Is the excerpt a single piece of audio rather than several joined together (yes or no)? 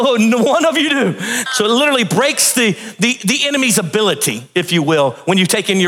no